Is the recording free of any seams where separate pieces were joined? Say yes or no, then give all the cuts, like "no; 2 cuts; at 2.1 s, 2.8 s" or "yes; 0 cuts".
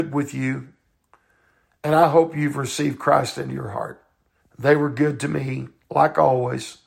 no; 1 cut; at 4.4 s